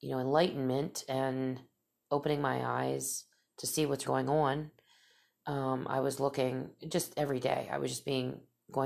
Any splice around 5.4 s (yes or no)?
no